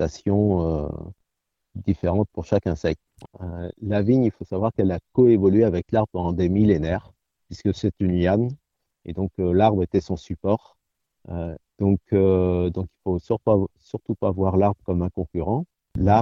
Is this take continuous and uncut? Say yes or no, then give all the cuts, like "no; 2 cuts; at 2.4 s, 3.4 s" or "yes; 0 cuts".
no; 2 cuts; at 3.3 s, 11.6 s